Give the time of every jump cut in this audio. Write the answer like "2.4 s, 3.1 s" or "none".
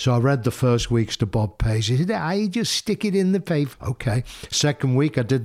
3.7 s